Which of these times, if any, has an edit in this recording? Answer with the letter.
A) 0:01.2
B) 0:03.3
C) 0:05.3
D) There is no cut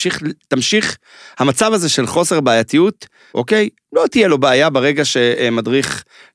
B